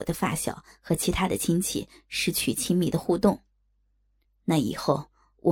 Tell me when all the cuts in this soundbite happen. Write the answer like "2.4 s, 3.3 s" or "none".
none

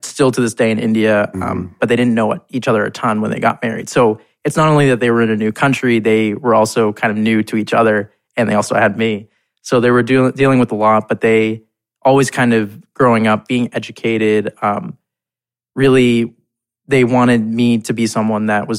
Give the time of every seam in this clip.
1.8 s, 13.5 s

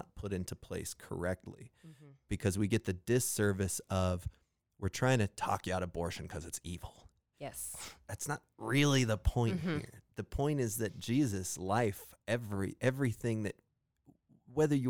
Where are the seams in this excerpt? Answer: none

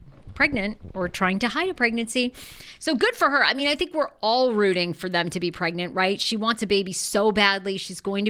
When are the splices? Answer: none

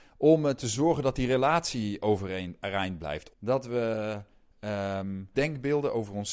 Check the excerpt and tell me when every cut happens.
3.3 s, 5.3 s

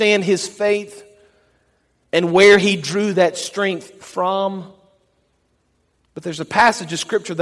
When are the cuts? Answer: none

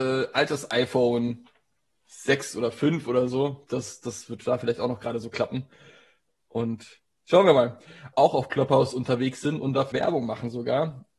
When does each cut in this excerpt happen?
8.1 s, 9.9 s

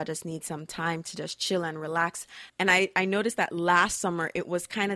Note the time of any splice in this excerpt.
2.5 s

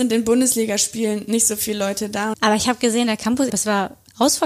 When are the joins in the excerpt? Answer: 2.3 s, 3.5 s

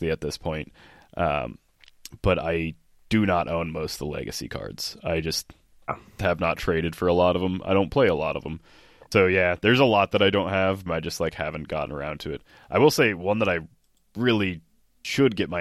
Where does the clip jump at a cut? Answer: 9.1 s, 10.9 s

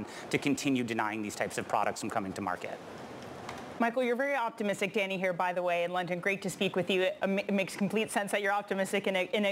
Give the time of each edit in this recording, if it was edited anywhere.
none

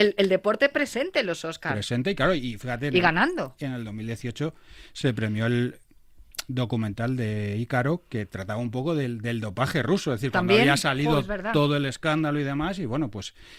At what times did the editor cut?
none

